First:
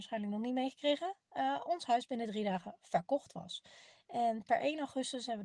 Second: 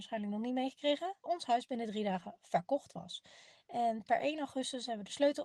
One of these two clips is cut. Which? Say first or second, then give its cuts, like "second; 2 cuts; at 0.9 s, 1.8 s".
second; 1 cut; at 1.2 s